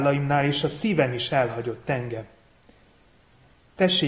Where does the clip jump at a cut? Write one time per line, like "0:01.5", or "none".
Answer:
none